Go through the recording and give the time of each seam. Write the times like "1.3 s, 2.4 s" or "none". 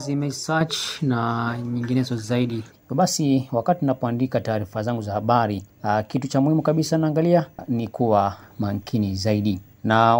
none